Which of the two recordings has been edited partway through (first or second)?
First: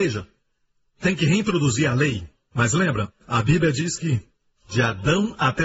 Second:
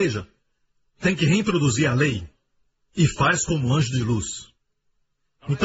first